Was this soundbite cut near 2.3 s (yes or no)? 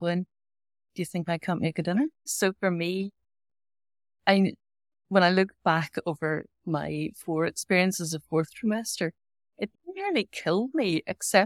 yes